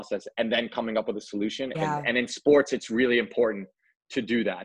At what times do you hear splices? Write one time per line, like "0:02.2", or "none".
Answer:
0:01.7